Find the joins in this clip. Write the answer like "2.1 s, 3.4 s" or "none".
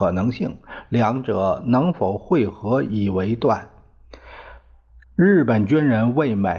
5.0 s

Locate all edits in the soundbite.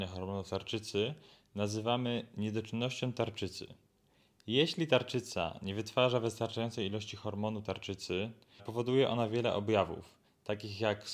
8.6 s

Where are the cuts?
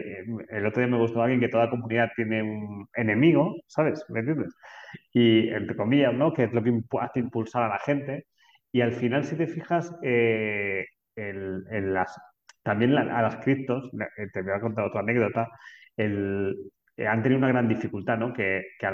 none

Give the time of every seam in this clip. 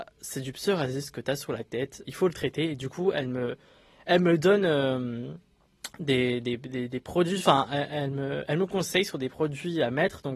2.1 s

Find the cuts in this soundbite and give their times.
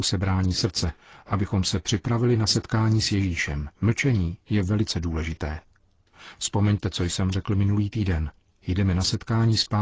3.7 s, 8.5 s

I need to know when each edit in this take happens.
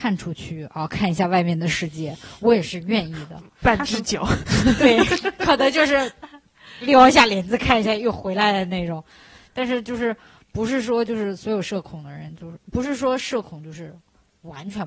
none

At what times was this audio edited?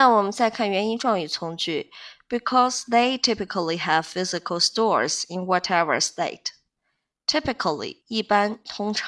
8.0 s

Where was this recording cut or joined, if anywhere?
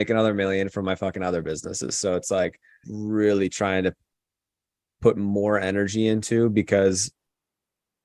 2.8 s

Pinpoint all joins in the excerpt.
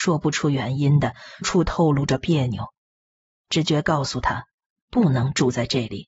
1.4 s

